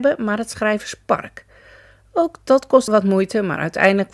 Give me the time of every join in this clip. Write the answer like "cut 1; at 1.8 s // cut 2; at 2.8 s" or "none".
cut 1; at 2.9 s

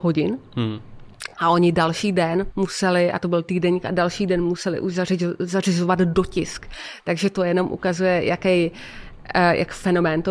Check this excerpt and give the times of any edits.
none

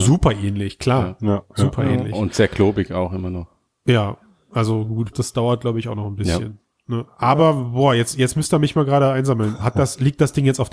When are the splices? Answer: cut 1; at 5.1 s

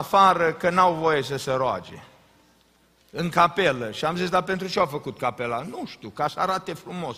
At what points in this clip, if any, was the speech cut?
none

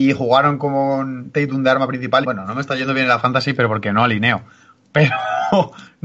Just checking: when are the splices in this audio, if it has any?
cut 1; at 2.2 s

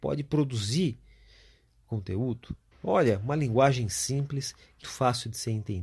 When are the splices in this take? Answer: cut 1; at 2.7 s // cut 2; at 4.8 s

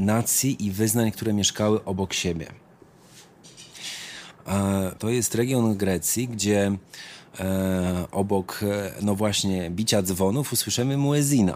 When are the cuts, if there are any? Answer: cut 1; at 5.0 s

